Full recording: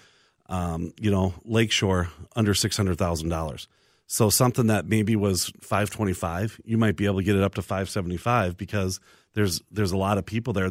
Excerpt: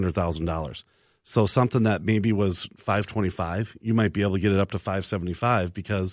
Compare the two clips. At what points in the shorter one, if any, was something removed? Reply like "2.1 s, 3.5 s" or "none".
none

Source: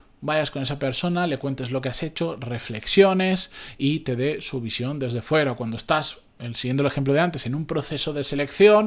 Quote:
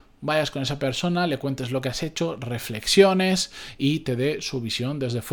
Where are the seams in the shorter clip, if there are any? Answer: none

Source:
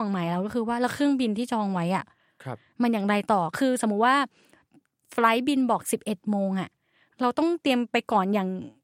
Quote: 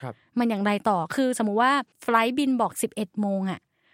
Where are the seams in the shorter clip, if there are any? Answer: 1.9 s

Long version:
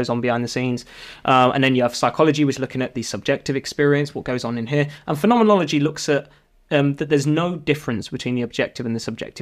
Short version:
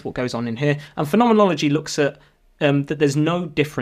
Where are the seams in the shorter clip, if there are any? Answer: none

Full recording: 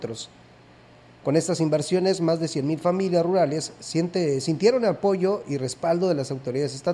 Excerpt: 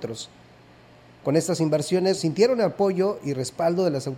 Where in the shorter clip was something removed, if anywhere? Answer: 2.2 s

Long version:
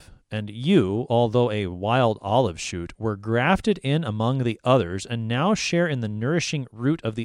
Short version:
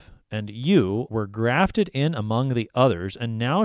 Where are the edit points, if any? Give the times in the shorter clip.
1.1 s

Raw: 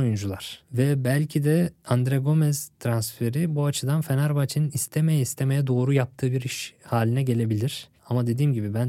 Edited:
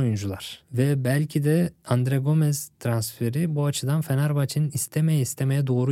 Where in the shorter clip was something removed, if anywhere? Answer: none

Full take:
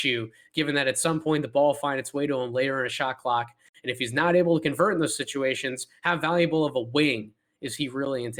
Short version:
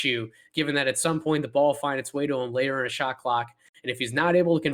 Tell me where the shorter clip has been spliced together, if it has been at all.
none

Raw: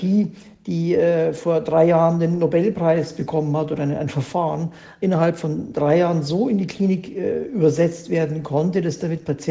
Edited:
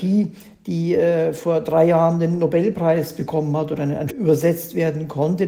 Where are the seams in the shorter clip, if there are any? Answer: 4.1 s

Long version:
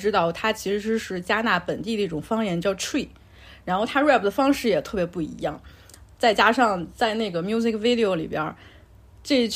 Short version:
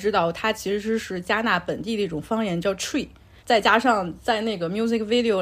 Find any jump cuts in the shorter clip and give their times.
3.4 s

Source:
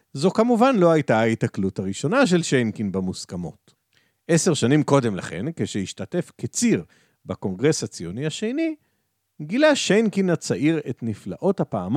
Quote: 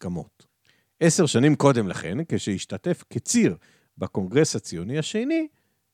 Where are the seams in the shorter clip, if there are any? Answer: none

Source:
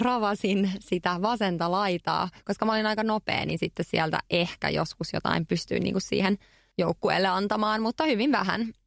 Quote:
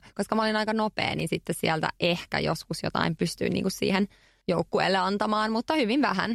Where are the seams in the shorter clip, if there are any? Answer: none

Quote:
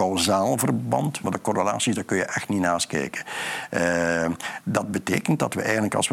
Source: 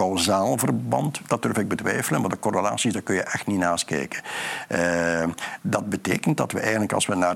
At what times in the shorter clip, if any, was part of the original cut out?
1.2 s

